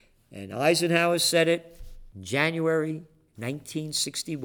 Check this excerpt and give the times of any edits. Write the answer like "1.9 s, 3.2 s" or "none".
2.1 s